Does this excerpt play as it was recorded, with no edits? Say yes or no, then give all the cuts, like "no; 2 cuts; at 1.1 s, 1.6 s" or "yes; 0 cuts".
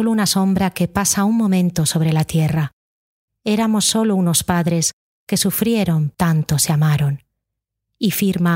no; 1 cut; at 6.1 s